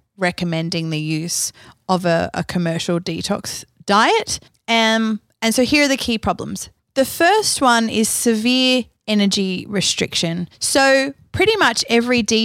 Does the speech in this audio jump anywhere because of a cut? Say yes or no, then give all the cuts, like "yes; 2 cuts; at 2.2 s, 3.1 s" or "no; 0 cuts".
no; 0 cuts